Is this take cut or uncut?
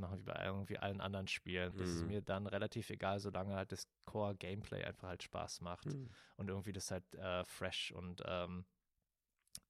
cut